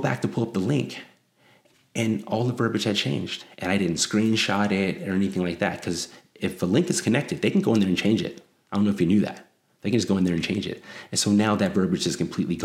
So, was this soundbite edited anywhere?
no; 0 cuts

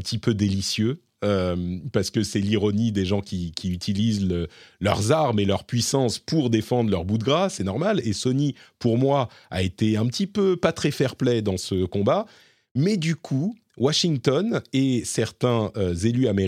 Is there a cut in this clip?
no; 0 cuts

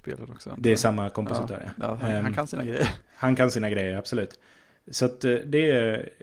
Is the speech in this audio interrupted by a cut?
no; 0 cuts

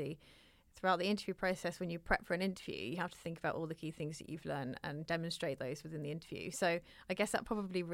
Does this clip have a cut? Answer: no; 0 cuts

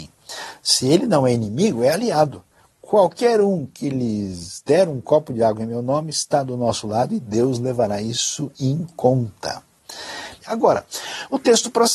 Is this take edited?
yes; 1 cut; at 10.4 s

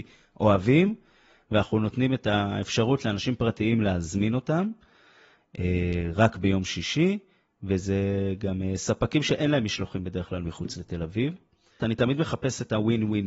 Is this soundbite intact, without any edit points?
no; 1 cut; at 11.8 s

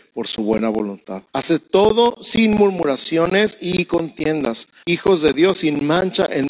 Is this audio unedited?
no; 2 cuts; at 1.3 s, 4.8 s

